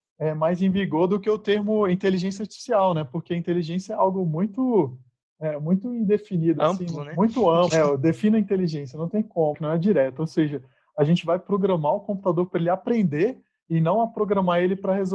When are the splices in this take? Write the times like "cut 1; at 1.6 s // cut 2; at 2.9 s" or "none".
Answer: cut 1; at 7.7 s // cut 2; at 9.5 s